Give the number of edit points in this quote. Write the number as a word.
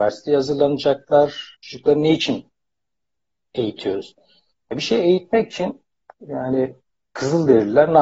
one